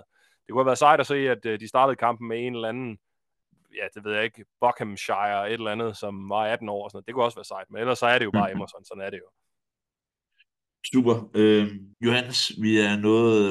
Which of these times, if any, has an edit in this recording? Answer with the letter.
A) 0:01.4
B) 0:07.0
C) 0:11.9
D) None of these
C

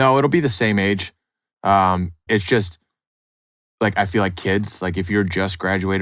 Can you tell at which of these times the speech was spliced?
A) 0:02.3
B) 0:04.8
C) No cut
A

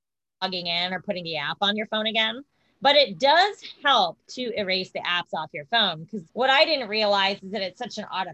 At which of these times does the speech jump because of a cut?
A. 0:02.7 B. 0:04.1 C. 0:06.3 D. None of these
C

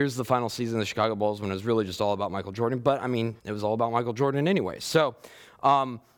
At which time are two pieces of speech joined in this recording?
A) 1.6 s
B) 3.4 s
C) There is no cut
B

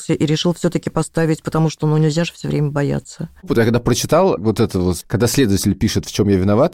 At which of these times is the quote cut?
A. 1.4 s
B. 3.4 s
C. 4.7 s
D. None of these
B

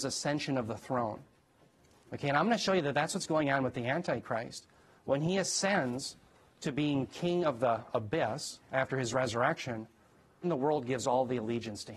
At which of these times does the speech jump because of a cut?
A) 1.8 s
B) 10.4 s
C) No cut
B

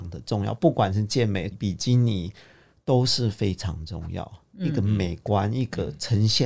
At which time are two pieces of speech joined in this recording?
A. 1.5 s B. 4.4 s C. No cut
A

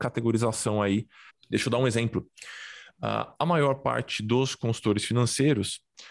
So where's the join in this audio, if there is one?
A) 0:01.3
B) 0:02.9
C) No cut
A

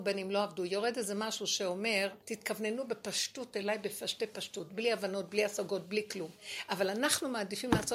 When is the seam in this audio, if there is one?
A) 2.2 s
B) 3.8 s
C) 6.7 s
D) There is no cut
A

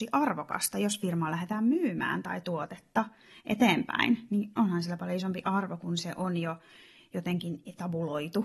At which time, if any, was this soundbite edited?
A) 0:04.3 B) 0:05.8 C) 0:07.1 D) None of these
D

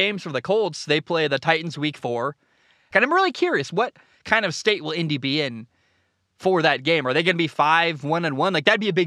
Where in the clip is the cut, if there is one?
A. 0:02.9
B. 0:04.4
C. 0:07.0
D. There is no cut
A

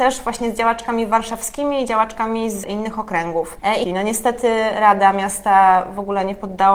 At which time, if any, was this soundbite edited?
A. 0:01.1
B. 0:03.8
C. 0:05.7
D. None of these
B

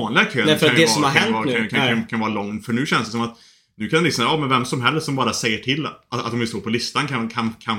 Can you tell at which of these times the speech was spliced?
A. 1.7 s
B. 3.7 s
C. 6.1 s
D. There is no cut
A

